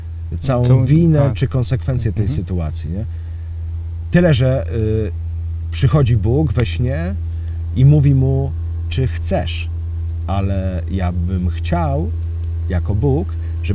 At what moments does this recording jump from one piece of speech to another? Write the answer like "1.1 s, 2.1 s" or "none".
none